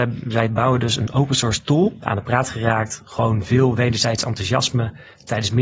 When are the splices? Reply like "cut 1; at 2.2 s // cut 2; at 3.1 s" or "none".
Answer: cut 1; at 2.0 s